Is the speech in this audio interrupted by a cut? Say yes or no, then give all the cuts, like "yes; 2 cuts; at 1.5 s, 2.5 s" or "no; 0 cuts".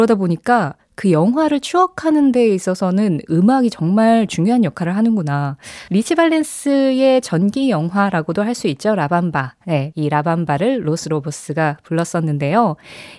yes; 2 cuts; at 5.9 s, 9.9 s